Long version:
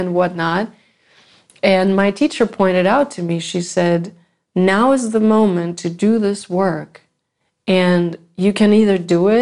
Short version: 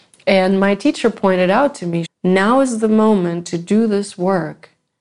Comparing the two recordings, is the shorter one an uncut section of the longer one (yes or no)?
no